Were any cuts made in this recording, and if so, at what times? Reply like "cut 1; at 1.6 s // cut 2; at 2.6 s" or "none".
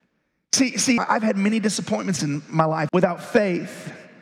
cut 1; at 1.0 s // cut 2; at 2.9 s